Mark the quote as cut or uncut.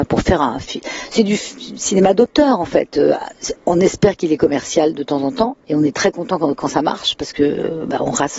uncut